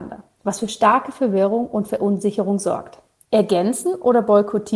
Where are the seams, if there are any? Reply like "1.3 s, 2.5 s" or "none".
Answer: 3.2 s